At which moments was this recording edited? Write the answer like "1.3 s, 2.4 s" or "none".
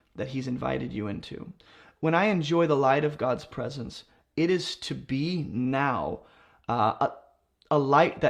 none